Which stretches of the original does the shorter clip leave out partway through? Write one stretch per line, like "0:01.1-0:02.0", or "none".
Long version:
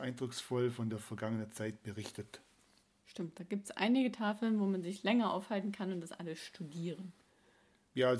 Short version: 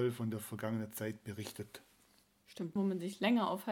0:03.3-0:04.6